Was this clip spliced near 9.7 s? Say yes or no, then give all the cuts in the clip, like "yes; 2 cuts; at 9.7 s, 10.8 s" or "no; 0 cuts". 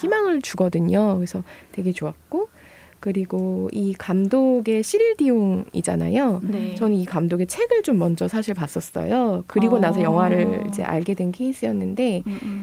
no; 0 cuts